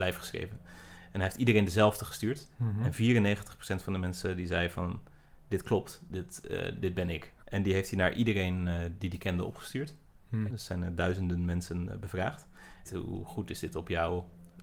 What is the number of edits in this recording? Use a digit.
3